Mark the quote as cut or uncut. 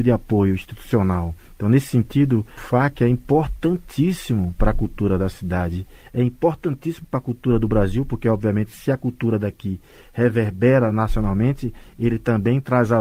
uncut